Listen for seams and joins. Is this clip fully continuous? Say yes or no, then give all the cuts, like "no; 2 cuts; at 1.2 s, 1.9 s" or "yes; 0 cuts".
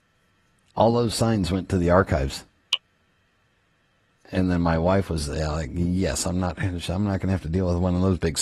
no; 1 cut; at 4.2 s